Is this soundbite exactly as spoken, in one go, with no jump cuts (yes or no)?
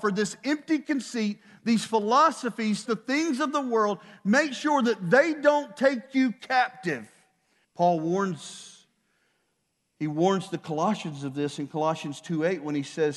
no